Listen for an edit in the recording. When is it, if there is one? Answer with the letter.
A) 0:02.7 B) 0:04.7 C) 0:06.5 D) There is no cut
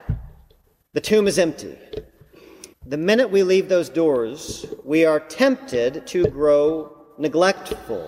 A